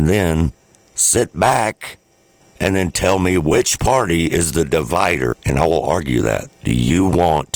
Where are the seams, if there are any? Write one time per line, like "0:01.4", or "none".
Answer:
0:02.4
0:05.3
0:06.5